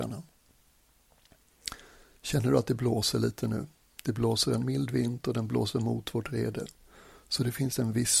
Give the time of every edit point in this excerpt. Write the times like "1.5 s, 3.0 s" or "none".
none